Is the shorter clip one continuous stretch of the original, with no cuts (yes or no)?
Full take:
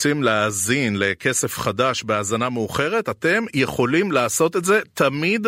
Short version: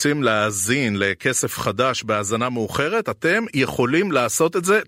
yes